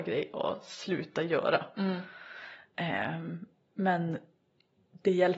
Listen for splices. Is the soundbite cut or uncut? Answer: uncut